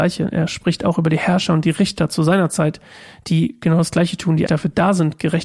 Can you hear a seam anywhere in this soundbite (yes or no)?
yes